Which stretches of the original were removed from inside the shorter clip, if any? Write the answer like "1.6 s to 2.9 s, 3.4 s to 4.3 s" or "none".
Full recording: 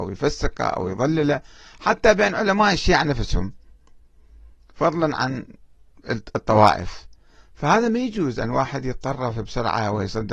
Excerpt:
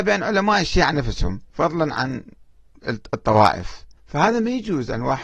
3.6 s to 4.7 s, 7.2 s to 7.5 s